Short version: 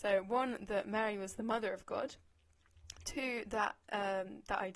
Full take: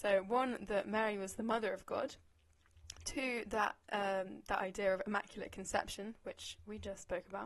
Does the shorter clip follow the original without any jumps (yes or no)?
yes